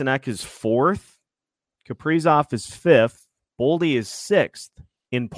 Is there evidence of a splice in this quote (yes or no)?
no